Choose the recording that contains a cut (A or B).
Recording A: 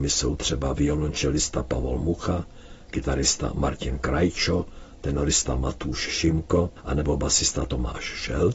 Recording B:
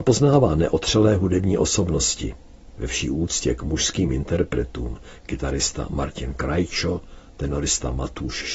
B